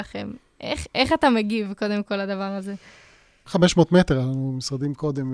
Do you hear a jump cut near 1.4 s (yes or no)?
no